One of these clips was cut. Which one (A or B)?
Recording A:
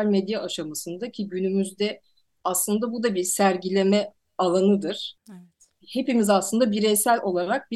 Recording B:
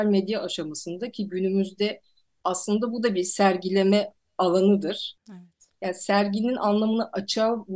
B